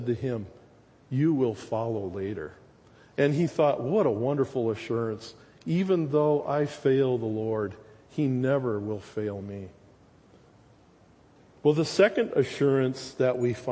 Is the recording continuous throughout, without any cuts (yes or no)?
yes